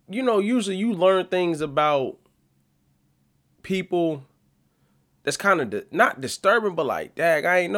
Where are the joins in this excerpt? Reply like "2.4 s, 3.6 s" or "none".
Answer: none